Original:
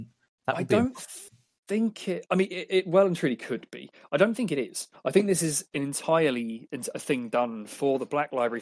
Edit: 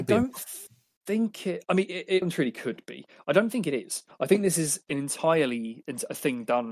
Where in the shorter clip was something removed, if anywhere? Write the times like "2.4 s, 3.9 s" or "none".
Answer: 2.2 s

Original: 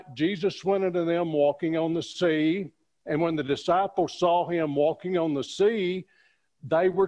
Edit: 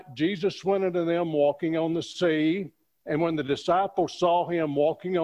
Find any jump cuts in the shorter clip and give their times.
none

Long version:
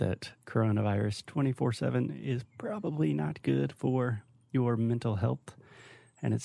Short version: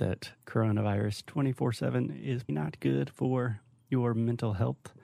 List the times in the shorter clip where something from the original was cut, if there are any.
2.5 s

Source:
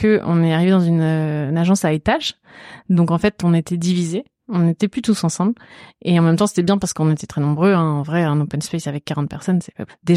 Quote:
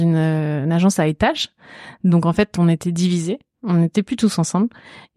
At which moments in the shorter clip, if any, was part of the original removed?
none

